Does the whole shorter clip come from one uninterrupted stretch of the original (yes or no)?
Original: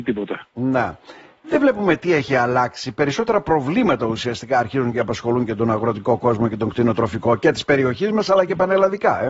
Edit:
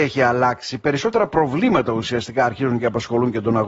yes